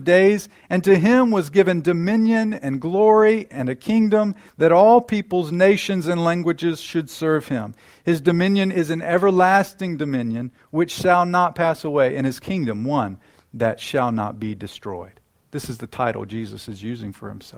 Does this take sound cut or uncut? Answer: uncut